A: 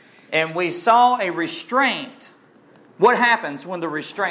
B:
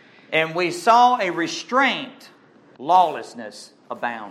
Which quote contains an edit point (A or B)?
B